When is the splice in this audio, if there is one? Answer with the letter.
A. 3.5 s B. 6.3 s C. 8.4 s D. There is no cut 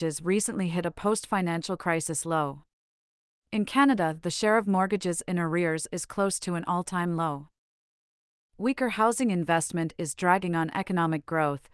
C